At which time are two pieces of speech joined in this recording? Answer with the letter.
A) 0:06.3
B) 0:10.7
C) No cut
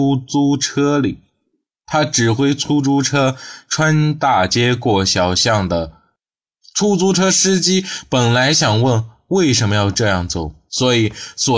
B